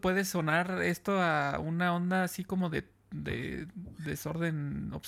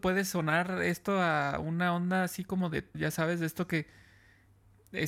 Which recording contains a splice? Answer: second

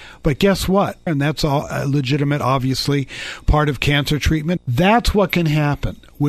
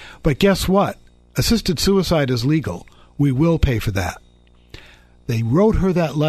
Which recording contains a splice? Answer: first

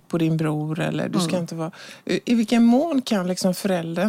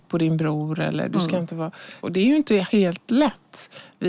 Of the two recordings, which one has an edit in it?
second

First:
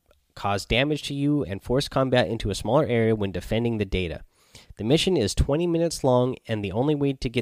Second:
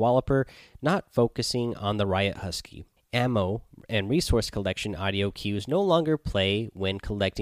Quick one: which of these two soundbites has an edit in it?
second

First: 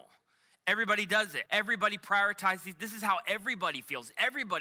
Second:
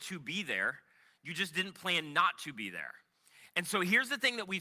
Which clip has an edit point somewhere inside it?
first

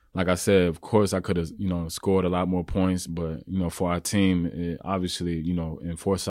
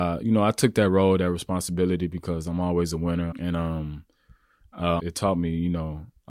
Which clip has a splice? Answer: second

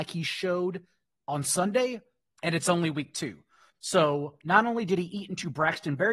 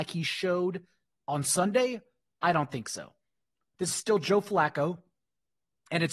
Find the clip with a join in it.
first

